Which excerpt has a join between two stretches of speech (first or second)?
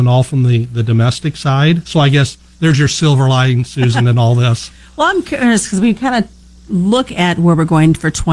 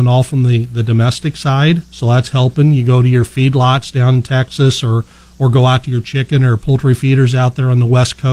first